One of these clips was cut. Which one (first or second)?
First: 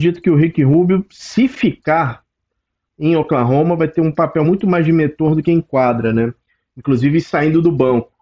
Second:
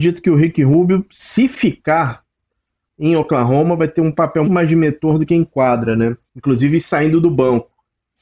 second